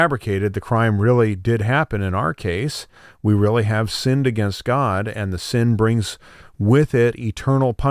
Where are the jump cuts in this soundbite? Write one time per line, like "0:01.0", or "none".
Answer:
none